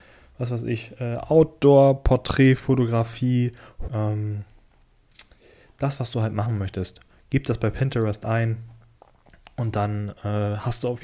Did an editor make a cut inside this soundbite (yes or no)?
yes